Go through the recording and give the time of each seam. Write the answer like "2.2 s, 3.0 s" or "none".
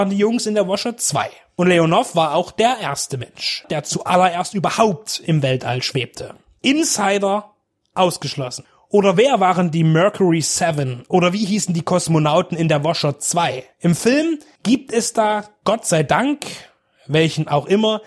3.6 s, 6.6 s